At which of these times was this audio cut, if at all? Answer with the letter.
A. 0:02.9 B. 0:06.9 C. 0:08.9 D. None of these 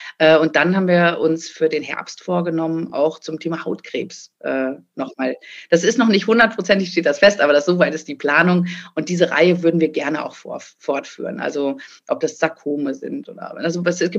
D